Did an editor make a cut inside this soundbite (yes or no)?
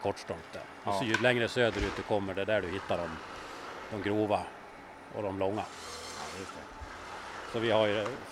no